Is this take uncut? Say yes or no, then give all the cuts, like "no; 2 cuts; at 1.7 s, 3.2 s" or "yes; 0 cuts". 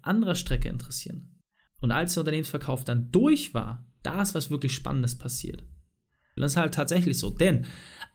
no; 2 cuts; at 1.7 s, 6.4 s